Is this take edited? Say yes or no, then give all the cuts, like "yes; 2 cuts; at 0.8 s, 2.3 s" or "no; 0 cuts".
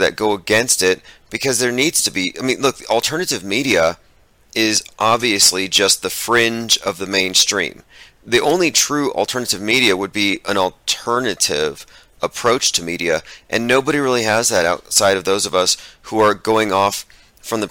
no; 0 cuts